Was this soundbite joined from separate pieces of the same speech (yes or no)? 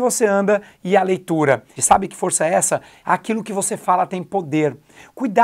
yes